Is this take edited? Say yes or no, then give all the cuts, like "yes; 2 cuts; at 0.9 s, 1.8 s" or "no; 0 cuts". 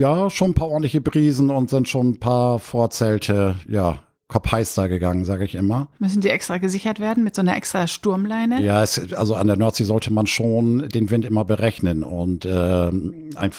no; 0 cuts